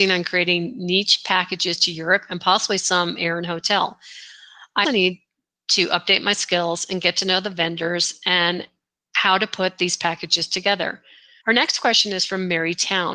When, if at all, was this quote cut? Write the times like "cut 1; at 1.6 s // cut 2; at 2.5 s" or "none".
cut 1; at 4.8 s // cut 2; at 11.4 s